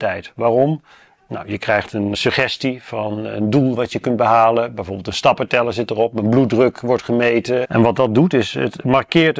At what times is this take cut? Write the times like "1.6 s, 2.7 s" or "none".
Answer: 2.1 s, 7.6 s